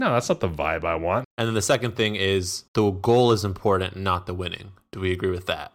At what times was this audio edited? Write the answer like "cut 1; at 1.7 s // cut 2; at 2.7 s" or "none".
cut 1; at 1.2 s // cut 2; at 2.7 s